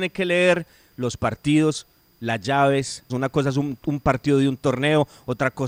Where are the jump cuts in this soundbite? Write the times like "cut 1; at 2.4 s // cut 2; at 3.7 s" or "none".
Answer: cut 1; at 3.1 s